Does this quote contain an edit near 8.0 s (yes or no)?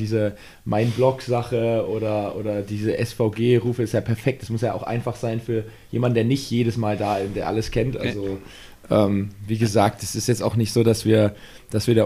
no